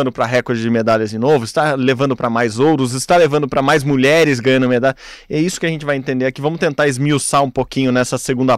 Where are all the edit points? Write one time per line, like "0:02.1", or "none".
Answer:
none